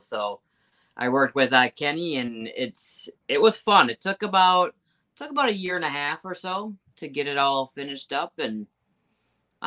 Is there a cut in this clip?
no; 0 cuts

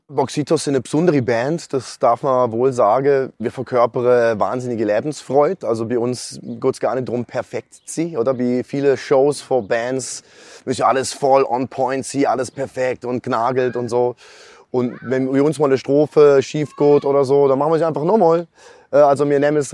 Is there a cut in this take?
no; 0 cuts

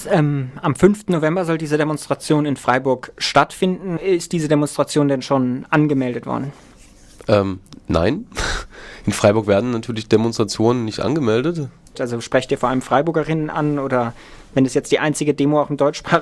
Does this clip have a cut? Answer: yes; 2 cuts; at 4.0 s, 11.9 s

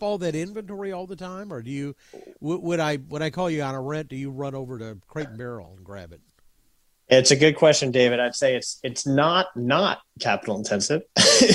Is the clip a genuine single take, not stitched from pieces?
yes; 0 cuts

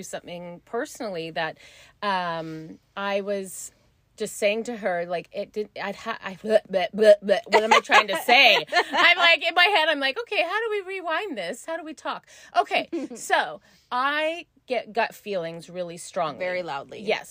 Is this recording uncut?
yes; 0 cuts

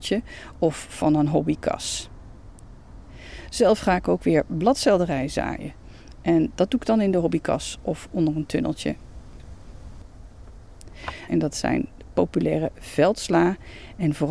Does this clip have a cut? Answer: yes; 1 cut; at 11.3 s

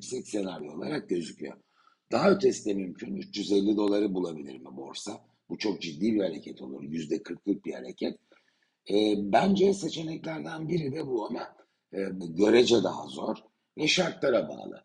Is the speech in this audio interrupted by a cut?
yes; 1 cut; at 12.2 s

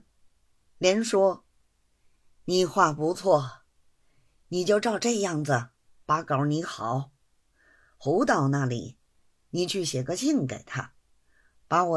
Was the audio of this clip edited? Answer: no; 0 cuts

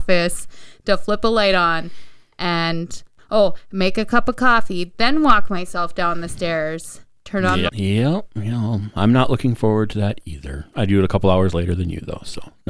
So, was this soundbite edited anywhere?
yes; 1 cut; at 7.7 s

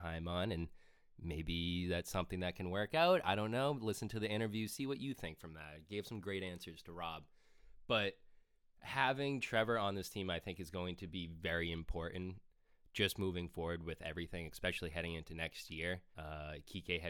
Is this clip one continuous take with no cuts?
no; 1 cut; at 16.1 s

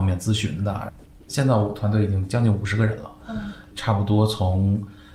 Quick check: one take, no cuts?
yes; 0 cuts

